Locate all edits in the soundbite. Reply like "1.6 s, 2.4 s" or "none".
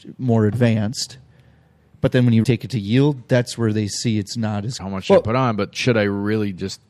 2.4 s, 4.8 s